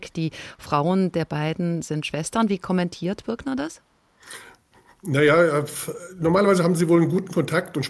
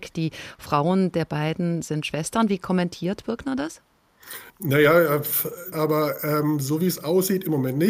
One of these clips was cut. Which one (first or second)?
second